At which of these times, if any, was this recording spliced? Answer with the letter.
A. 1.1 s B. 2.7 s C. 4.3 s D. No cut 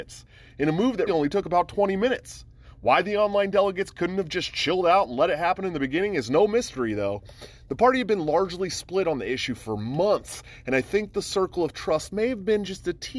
A